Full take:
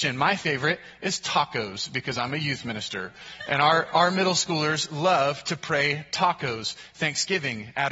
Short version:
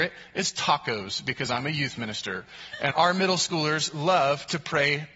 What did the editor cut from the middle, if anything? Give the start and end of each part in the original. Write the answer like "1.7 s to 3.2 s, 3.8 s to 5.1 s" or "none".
3.6 s to 3.9 s